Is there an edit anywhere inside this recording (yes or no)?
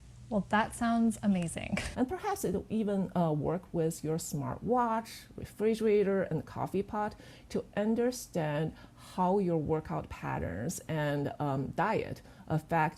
yes